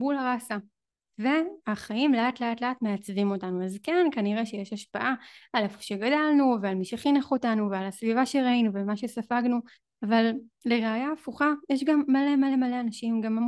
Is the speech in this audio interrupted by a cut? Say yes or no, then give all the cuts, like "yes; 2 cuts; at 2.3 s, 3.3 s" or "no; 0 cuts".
no; 0 cuts